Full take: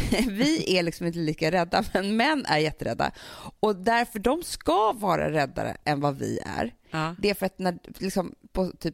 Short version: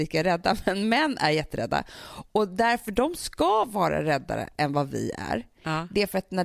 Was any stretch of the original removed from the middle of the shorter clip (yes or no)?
no